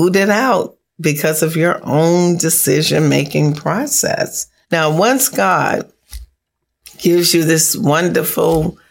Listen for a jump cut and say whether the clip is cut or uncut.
cut